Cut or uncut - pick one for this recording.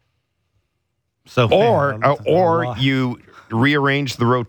uncut